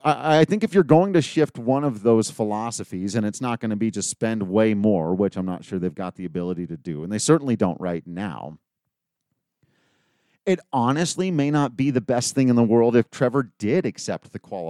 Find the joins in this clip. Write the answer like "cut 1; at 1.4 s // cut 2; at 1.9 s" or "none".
none